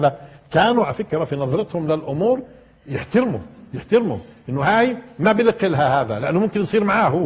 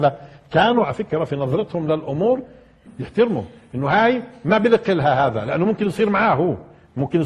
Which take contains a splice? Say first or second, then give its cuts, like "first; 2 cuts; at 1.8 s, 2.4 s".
second; 1 cut; at 2.9 s